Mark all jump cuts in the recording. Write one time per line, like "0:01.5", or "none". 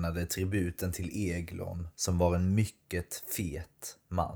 0:01.9